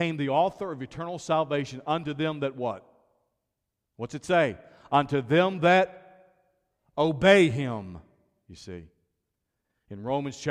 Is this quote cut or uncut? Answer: uncut